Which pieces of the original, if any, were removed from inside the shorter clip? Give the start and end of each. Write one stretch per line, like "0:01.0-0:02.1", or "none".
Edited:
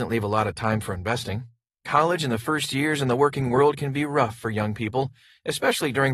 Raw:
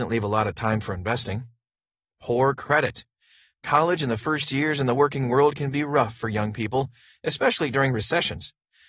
0:01.8-0:03.6